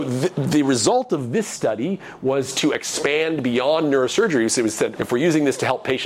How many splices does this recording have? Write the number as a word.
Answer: one